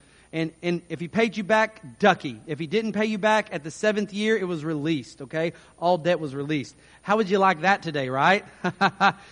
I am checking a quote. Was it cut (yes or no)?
no